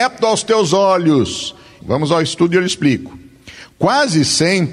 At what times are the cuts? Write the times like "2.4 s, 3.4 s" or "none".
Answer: 1.8 s